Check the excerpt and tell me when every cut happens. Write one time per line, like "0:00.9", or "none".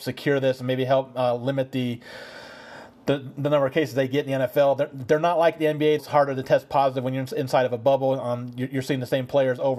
0:06.0